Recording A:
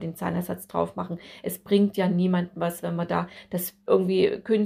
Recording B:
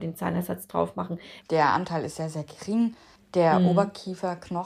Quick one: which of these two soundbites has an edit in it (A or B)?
B